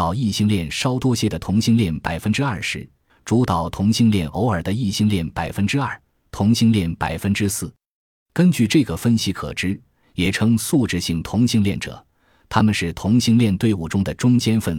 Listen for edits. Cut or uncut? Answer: cut